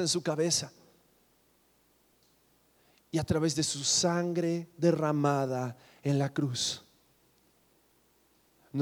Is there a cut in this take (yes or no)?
no